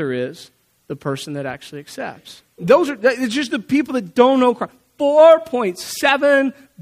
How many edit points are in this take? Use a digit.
1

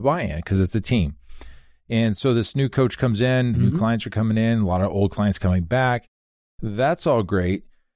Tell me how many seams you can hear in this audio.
1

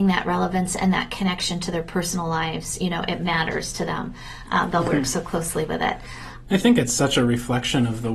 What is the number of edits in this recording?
2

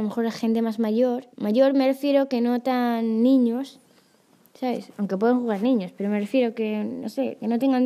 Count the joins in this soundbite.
1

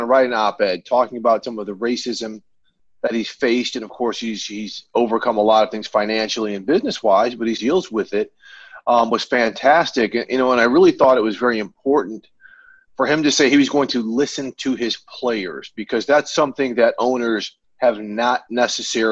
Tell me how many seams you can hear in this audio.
1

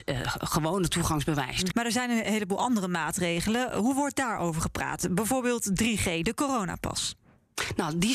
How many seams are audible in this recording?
1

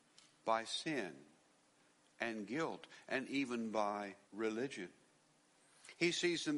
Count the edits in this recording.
1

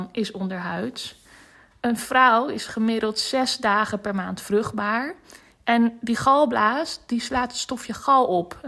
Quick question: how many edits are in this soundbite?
0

